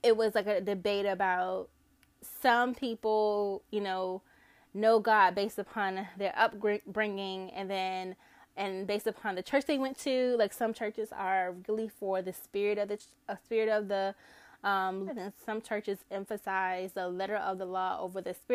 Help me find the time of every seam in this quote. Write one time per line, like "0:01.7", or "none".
0:15.1